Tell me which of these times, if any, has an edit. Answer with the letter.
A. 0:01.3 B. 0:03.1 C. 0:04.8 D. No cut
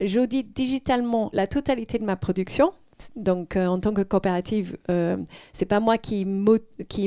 A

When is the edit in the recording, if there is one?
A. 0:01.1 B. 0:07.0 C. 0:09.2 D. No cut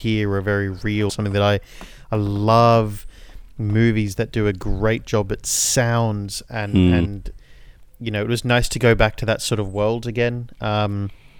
A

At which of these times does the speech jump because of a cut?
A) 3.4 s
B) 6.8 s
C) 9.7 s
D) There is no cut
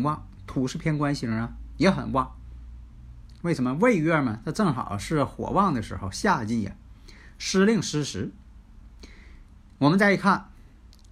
A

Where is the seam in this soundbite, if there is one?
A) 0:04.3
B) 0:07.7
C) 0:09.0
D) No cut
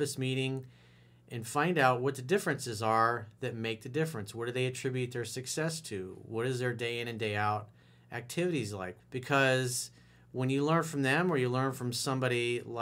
C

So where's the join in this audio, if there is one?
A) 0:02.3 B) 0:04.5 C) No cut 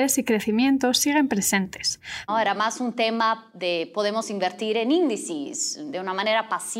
A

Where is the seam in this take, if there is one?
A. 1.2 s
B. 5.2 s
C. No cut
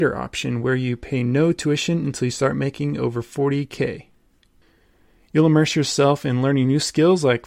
C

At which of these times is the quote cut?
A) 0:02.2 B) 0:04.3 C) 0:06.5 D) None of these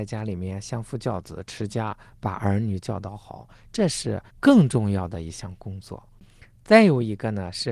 B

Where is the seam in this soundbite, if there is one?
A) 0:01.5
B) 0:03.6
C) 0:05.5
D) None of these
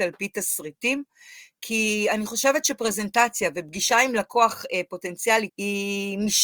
C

